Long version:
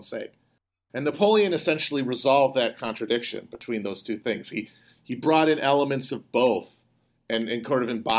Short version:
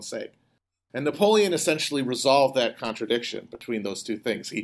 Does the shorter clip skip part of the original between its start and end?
no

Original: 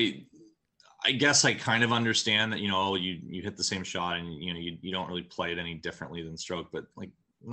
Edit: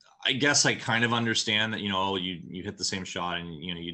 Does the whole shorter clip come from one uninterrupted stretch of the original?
yes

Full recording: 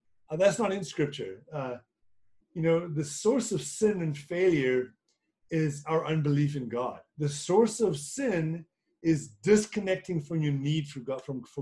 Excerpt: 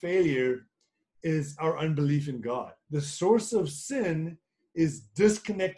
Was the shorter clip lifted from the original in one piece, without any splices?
yes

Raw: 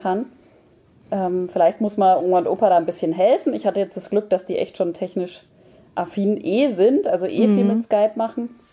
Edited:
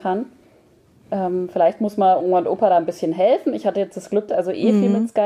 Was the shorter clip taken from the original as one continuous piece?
no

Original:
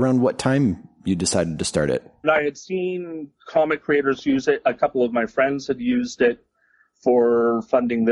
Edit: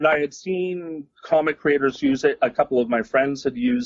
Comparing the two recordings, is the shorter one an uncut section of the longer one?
yes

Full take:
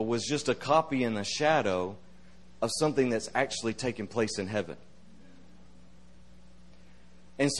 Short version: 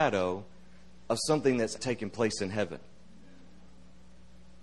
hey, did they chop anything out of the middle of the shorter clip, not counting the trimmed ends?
yes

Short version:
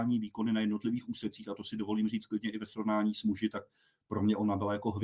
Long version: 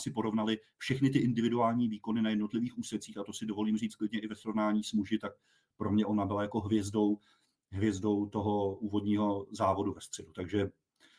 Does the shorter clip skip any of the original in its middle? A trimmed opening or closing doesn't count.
no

